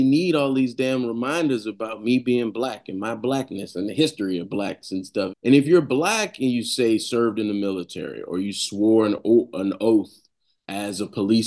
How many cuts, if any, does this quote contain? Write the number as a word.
one